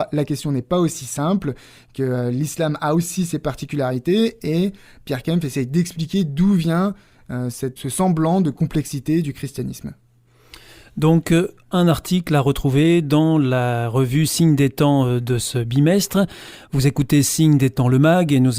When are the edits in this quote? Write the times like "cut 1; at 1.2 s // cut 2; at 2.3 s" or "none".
cut 1; at 7.8 s